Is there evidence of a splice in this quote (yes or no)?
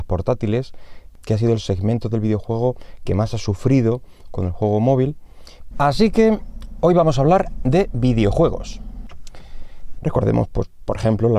yes